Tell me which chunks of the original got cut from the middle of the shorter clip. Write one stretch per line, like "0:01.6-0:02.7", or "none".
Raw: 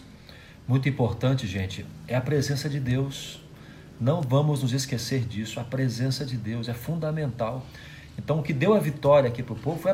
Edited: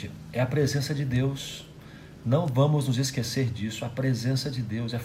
none